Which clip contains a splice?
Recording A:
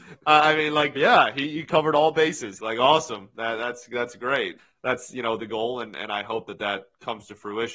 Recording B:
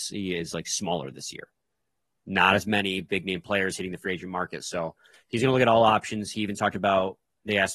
A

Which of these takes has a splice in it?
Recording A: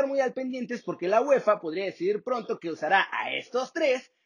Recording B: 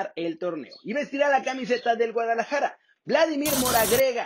B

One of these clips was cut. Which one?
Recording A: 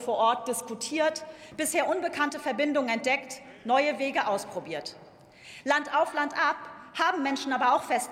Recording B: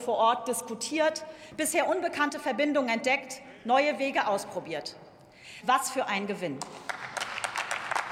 B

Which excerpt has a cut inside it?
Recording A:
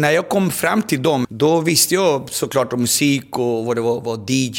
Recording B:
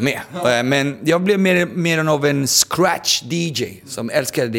A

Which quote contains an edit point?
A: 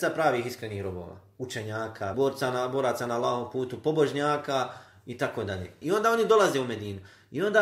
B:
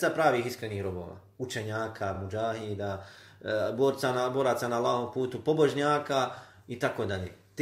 A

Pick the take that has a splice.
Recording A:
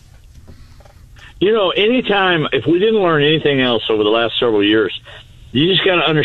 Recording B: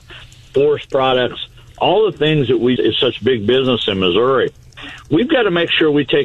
B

